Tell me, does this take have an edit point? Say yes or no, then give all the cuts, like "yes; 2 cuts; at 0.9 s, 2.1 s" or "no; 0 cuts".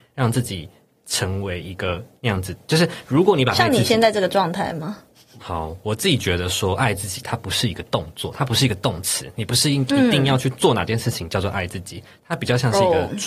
yes; 1 cut; at 5.4 s